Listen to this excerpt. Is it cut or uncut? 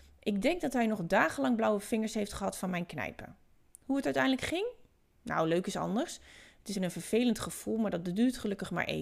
cut